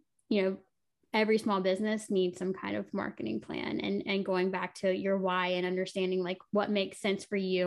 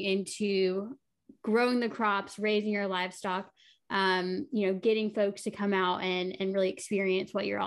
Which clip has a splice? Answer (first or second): first